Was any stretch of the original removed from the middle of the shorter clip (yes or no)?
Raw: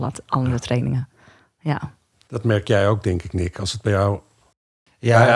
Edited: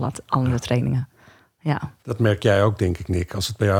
yes